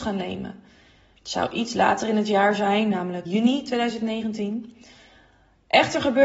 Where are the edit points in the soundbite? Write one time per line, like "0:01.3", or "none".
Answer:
0:01.2
0:03.3